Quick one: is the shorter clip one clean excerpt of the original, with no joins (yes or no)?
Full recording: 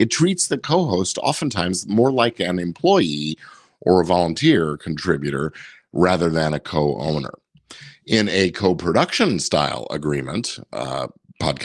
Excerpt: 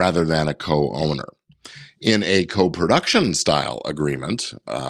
yes